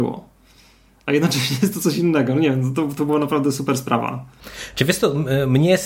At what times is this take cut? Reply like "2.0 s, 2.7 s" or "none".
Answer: none

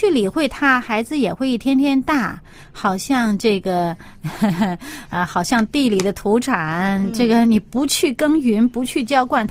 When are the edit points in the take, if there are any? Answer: none

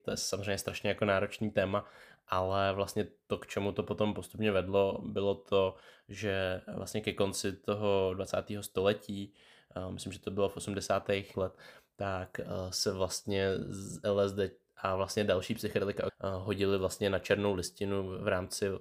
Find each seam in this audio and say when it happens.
11.3 s, 16.1 s

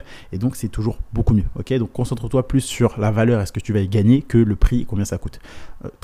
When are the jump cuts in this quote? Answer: none

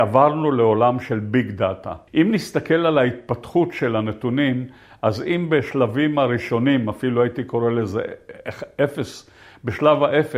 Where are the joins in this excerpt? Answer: 2.1 s

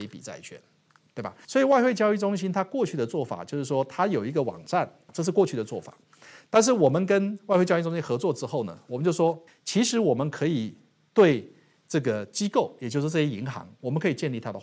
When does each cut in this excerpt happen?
9.5 s

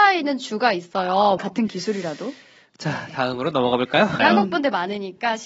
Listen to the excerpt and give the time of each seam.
1.4 s, 4.2 s

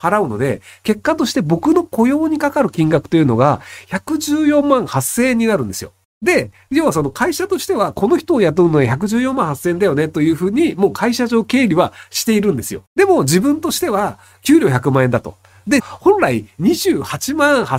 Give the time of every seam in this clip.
12.9 s, 15.8 s

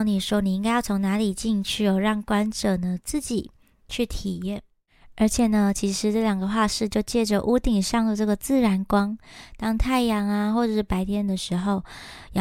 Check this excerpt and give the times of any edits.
none

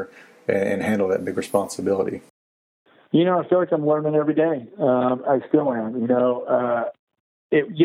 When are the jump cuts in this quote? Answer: none

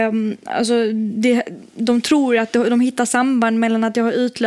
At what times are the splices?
none

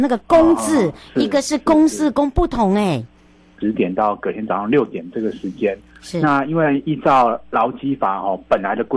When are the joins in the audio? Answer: 3.6 s

